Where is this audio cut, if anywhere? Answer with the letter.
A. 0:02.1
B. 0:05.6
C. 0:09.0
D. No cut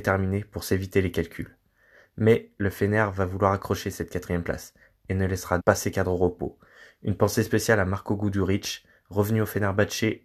B